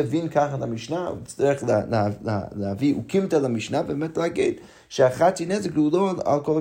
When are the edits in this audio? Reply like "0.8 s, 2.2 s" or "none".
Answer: none